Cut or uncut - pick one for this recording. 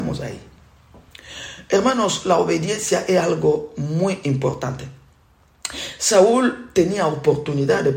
uncut